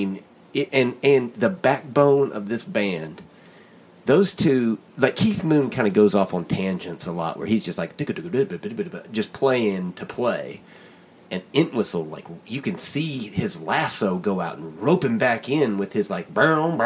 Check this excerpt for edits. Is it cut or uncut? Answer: uncut